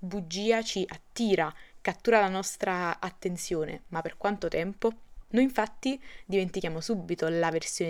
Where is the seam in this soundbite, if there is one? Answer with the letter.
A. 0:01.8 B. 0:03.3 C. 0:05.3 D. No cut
C